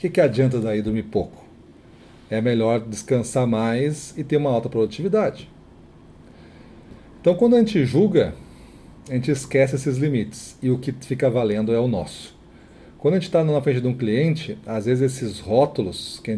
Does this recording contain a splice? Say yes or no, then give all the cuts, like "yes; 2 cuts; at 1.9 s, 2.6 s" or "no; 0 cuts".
no; 0 cuts